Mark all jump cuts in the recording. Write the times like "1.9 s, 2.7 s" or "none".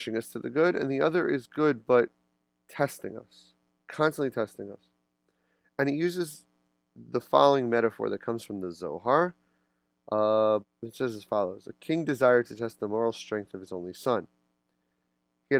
10.6 s